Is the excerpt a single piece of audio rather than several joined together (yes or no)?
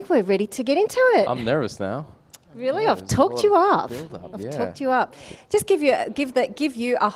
no